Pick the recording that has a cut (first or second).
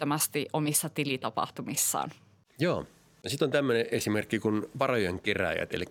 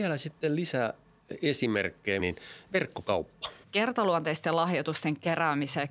second